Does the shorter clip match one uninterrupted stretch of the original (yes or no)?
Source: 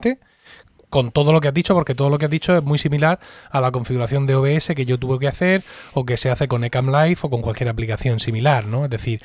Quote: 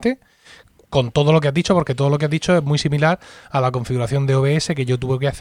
yes